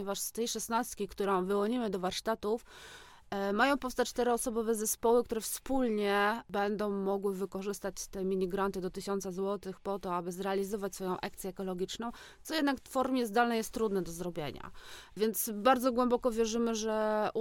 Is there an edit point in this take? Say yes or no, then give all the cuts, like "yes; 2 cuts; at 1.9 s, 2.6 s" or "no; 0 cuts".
no; 0 cuts